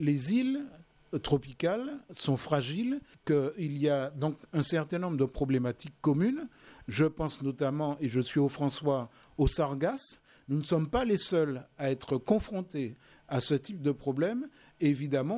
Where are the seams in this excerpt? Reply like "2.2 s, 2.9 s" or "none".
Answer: 3.1 s